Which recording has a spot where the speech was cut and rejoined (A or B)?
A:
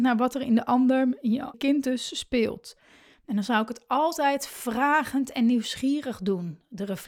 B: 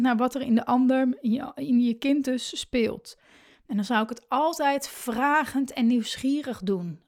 A